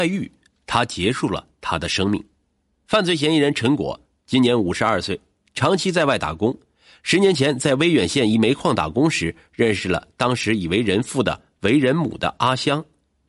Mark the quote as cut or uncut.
uncut